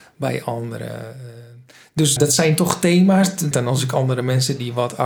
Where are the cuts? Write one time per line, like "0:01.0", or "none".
0:02.2
0:03.5